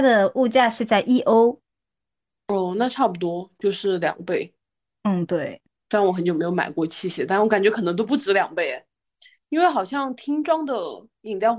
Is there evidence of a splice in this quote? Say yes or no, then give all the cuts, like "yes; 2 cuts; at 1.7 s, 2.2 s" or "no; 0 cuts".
no; 0 cuts